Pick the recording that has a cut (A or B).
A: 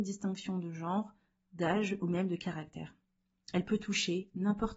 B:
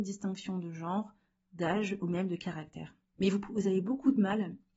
B